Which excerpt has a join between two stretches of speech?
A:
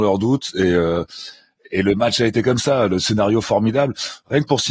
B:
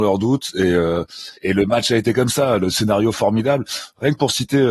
B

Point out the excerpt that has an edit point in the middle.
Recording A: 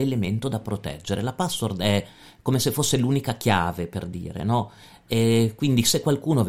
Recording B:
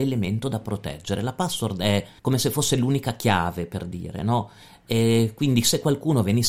B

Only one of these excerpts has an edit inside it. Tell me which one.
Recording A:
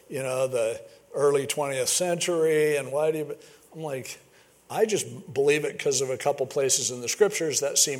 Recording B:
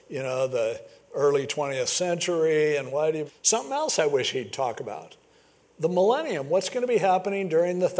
B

